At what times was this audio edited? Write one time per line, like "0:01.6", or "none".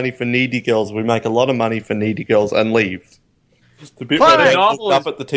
0:03.6